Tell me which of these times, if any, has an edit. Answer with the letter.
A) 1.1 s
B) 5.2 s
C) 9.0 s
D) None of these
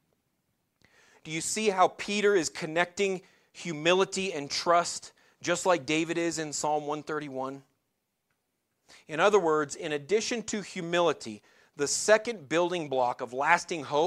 D